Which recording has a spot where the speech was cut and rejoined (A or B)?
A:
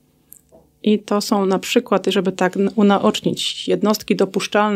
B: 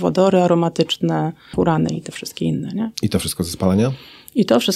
B